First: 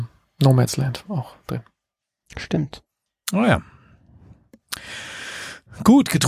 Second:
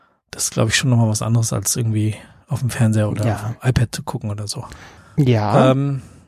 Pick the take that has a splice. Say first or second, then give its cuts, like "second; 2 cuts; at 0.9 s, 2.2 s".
second; 1 cut; at 5.0 s